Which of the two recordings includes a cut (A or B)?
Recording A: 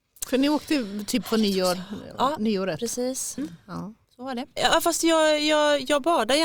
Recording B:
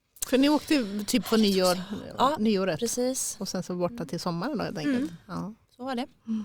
A